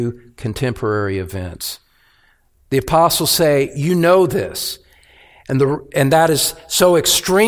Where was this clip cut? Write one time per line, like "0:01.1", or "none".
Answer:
0:02.5